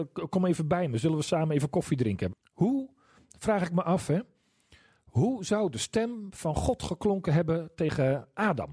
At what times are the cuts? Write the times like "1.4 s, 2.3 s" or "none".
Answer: 2.3 s